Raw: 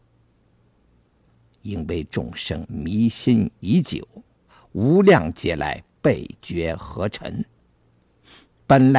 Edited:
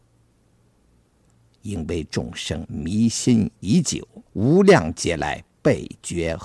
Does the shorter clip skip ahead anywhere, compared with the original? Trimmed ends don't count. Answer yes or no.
yes